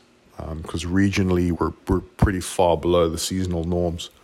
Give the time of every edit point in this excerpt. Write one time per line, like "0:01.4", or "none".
0:01.5